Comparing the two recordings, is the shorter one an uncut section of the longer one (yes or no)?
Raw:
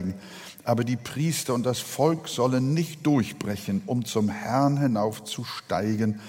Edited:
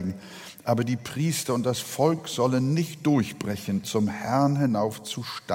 no